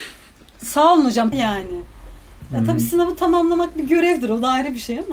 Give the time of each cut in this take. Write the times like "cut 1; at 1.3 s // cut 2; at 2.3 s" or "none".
cut 1; at 1.3 s